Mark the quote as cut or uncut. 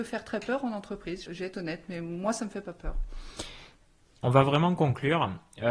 cut